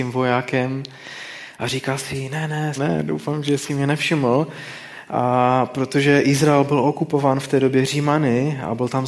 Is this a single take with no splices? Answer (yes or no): no